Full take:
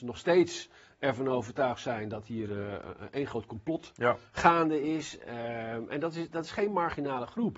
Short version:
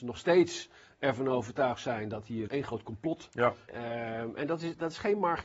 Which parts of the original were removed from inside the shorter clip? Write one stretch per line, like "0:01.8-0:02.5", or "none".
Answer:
0:02.5-0:03.1
0:04.3-0:05.2